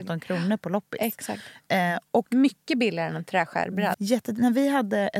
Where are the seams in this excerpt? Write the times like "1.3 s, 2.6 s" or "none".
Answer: 3.9 s